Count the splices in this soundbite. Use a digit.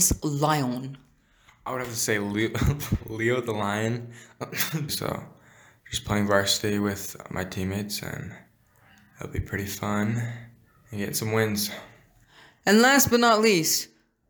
1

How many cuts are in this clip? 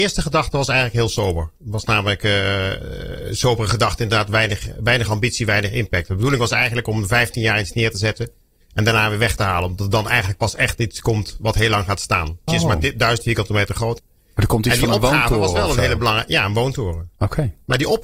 2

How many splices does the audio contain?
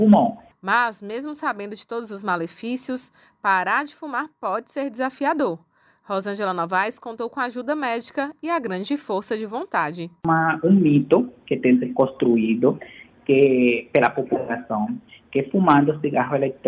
1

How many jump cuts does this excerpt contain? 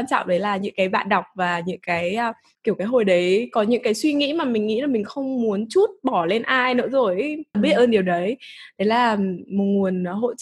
2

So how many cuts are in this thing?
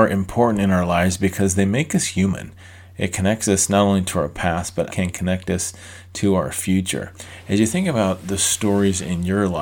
1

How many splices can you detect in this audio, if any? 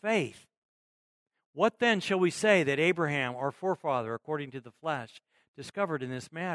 0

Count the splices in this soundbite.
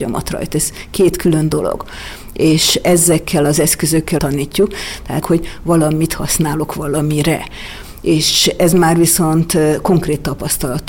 2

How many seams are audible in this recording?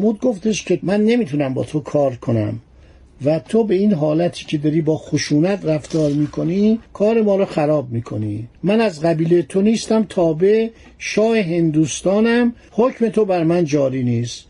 1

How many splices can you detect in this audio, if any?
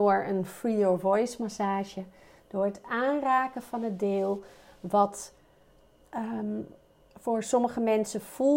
0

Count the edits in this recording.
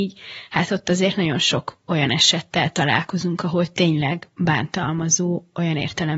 0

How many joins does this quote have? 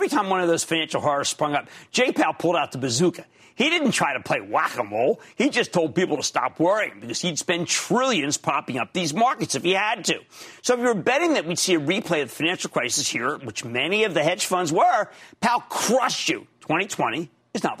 0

